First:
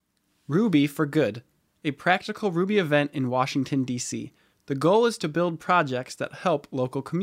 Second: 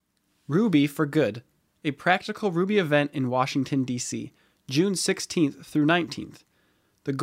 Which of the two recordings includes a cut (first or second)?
first